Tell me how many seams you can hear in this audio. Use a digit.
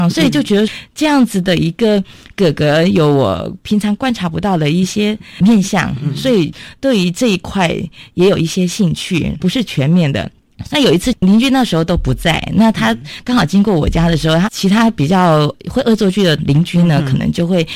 3